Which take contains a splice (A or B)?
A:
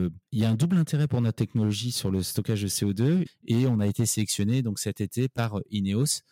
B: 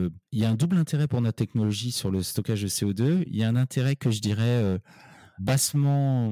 A